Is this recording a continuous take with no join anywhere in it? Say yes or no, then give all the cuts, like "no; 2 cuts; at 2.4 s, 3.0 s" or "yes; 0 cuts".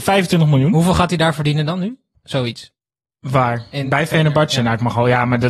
yes; 0 cuts